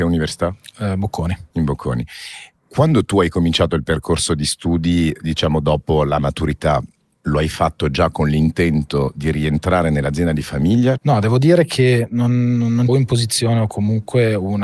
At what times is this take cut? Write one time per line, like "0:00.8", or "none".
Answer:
0:11.0
0:12.9